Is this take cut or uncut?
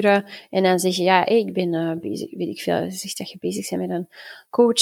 uncut